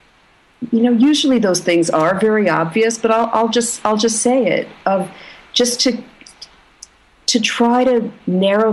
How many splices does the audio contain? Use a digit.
0